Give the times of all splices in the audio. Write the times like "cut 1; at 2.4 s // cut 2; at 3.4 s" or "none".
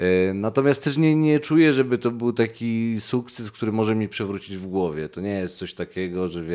none